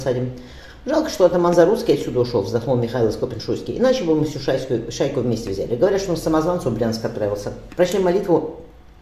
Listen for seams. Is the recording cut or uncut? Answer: cut